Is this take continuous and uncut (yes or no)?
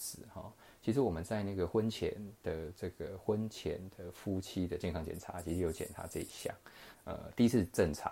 no